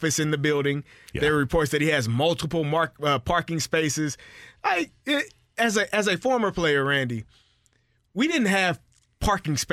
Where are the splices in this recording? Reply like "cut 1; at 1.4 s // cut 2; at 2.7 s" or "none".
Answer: none